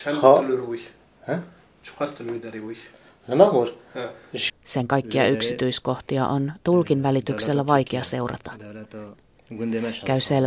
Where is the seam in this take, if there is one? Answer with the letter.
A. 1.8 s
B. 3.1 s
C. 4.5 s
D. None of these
C